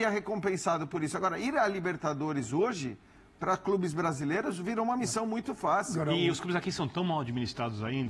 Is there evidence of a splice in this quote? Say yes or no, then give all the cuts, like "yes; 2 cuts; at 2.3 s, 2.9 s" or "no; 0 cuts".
no; 0 cuts